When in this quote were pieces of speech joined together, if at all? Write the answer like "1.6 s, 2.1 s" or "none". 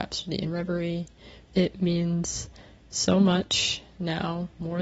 1.5 s